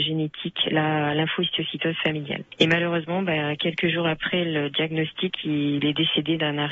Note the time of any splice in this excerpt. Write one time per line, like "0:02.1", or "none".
none